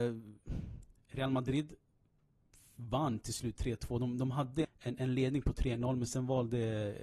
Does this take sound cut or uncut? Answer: cut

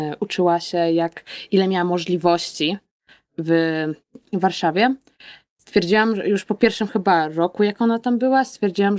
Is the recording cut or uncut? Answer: cut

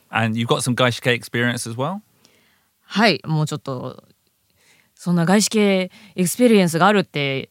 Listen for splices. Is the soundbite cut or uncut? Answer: cut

